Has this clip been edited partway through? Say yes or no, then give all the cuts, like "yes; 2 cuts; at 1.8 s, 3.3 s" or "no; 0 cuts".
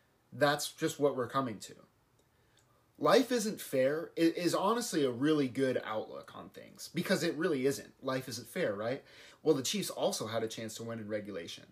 yes; 1 cut; at 9.3 s